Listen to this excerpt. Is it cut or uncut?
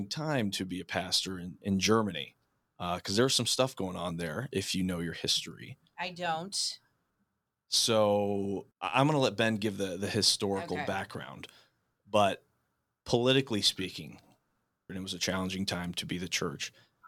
cut